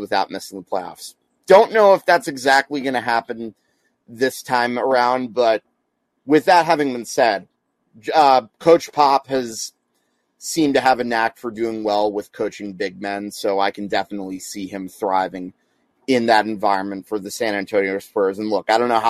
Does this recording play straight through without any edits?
yes; 0 cuts

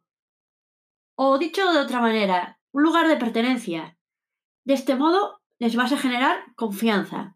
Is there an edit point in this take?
yes; 1 cut; at 2.6 s

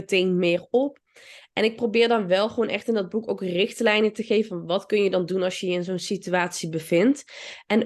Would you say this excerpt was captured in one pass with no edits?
yes; 0 cuts

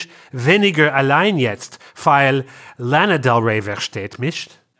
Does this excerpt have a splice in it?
no; 0 cuts

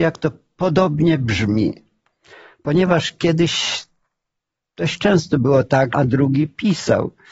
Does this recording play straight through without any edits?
no; 1 cut; at 5.9 s

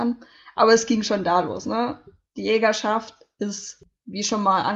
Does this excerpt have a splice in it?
no; 0 cuts

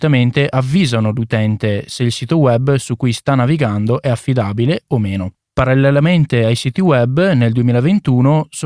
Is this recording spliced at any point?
no; 0 cuts

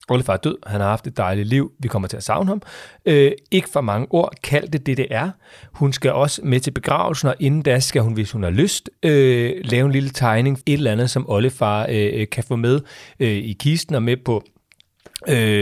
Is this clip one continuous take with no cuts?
no; 1 cut; at 10.6 s

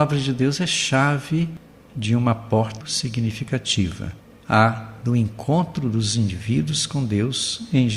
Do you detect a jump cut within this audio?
yes; 1 cut; at 2.8 s

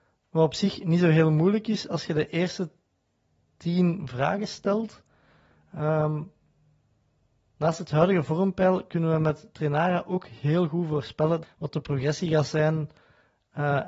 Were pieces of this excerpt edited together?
yes; 1 cut; at 11.4 s

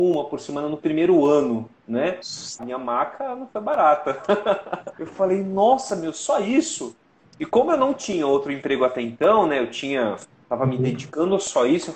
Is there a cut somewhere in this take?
yes; 2 cuts; at 2.6 s, 4.9 s

